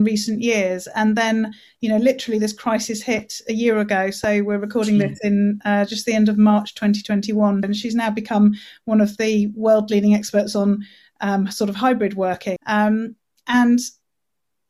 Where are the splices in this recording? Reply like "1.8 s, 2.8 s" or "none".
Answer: 7.6 s, 12.6 s